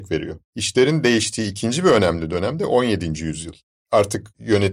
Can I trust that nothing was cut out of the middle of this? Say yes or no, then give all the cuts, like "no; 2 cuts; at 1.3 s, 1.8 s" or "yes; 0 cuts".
yes; 0 cuts